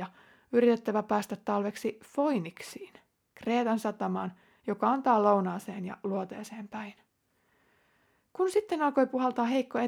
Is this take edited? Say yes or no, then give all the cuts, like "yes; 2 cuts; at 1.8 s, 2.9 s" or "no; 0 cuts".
no; 0 cuts